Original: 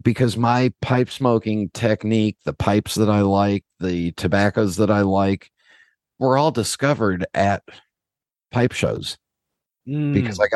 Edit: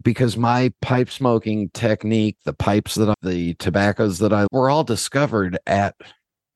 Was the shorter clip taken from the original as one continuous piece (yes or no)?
no